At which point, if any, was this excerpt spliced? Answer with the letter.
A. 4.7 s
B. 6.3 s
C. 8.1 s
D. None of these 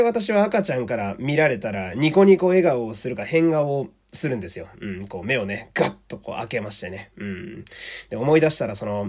A